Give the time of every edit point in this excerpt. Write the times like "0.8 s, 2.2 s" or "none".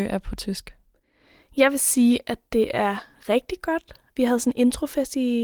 4.2 s